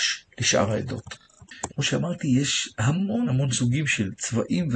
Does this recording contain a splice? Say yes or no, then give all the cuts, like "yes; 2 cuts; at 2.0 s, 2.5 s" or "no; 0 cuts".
yes; 2 cuts; at 1.7 s, 3.2 s